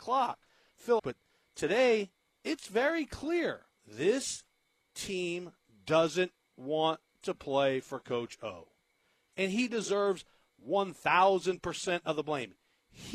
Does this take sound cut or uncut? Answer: cut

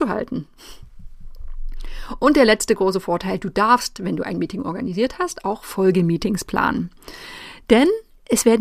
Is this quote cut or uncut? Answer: uncut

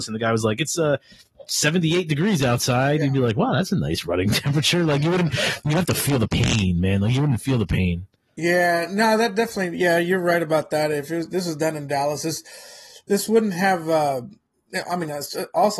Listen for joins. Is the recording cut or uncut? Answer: uncut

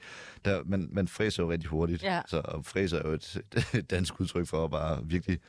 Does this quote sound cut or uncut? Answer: uncut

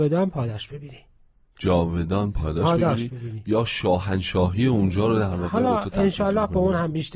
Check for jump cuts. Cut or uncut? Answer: uncut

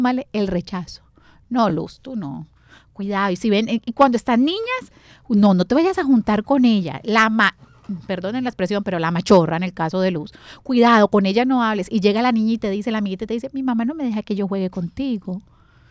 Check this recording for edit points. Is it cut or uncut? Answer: uncut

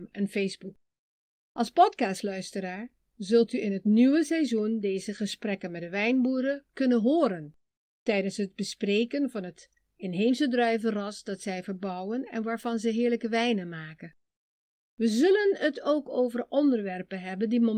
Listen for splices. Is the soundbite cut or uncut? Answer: uncut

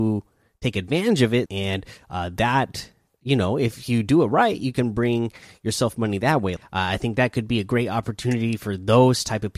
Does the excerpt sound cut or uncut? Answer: cut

